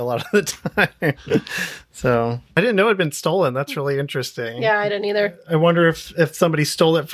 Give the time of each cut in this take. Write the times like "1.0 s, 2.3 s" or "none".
none